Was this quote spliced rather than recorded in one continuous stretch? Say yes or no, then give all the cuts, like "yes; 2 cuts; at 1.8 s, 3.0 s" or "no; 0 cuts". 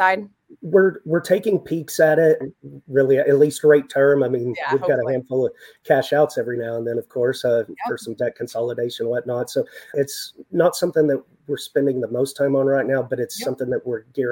yes; 2 cuts; at 2.4 s, 9.9 s